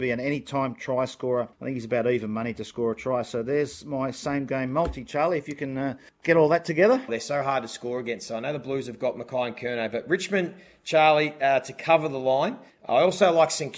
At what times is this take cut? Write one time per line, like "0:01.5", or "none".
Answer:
0:07.1